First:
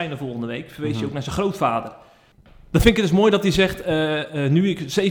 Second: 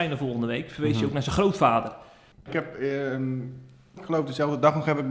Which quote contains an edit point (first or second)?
second